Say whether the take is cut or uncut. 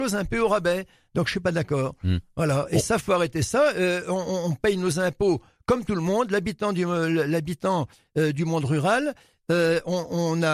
uncut